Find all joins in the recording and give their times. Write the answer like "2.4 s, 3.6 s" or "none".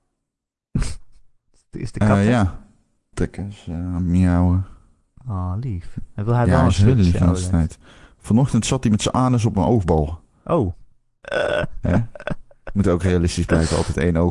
3.1 s, 11.2 s